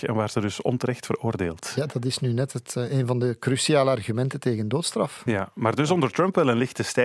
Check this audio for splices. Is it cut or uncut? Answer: cut